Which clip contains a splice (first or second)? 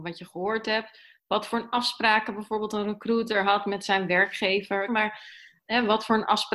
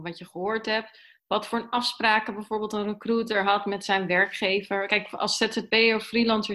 first